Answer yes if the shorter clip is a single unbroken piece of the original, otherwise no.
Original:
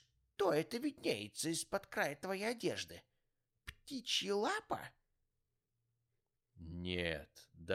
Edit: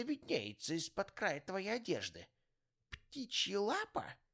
yes